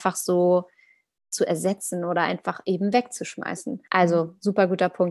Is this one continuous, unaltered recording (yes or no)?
no